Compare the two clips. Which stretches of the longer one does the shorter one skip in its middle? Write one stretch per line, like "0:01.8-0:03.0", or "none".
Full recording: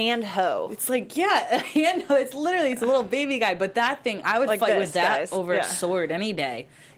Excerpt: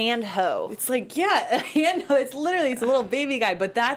none